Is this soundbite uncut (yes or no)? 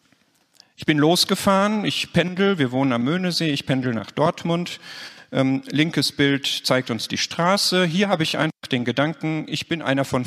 yes